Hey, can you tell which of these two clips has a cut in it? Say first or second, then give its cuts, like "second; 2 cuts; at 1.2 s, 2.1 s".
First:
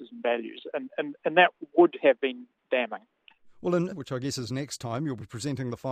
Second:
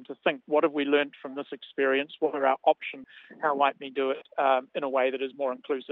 first; 1 cut; at 3.9 s